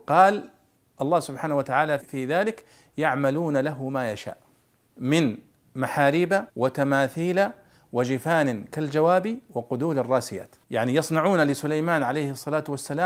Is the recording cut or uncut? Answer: cut